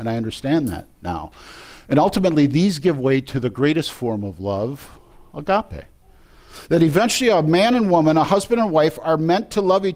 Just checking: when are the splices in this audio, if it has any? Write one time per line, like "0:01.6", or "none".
none

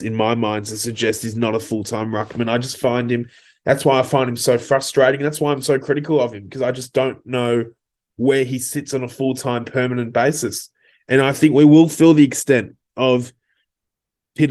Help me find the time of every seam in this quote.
none

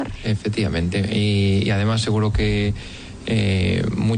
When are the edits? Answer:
none

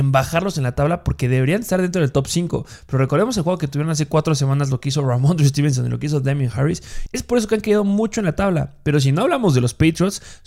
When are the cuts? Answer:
0:07.1

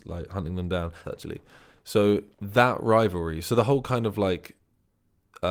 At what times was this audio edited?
0:01.0
0:02.3

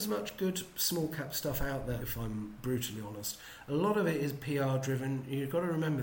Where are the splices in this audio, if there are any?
0:02.0

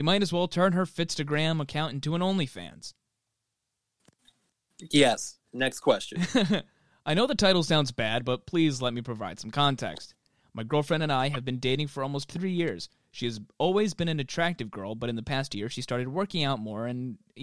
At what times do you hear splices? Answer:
none

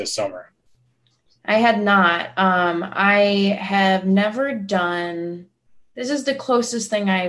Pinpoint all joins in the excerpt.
none

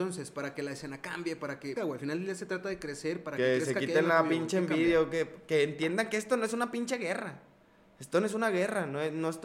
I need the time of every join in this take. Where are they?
0:01.8

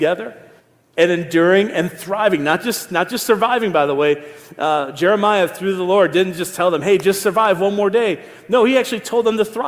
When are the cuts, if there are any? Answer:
none

